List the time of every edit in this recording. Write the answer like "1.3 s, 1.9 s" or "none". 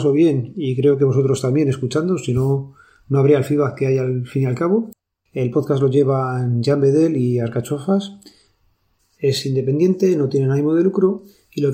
5.1 s, 9.0 s